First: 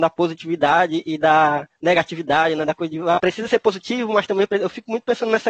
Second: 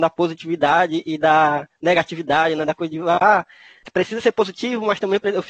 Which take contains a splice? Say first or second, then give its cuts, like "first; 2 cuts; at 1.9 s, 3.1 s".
first; 1 cut; at 3.2 s